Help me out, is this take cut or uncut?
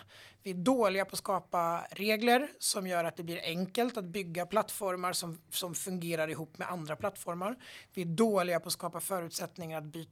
uncut